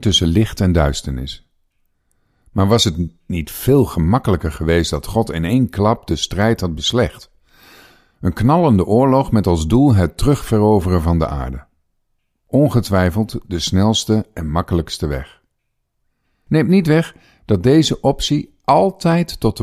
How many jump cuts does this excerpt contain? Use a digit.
1